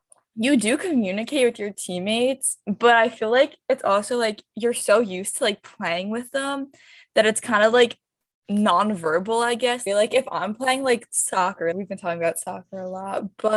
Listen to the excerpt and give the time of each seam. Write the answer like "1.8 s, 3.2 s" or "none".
9.9 s, 11.7 s